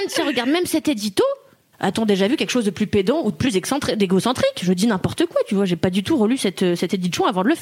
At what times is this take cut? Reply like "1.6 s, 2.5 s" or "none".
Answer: 1.7 s